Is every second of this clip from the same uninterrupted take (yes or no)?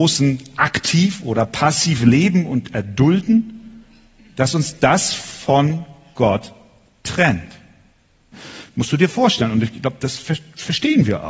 no